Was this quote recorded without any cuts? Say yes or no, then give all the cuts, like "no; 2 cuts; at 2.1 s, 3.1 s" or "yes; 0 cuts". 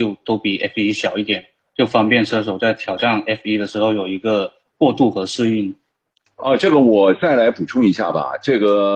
yes; 0 cuts